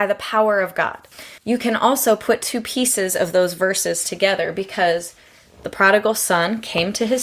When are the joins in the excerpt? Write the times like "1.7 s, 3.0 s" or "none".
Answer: 1.4 s